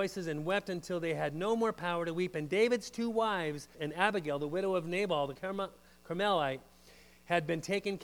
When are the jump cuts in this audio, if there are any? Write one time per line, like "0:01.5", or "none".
0:03.7
0:05.4